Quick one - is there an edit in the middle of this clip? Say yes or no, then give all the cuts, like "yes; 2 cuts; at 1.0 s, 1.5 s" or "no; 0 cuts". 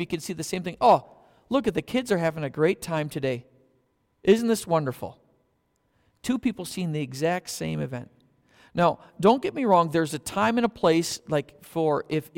no; 0 cuts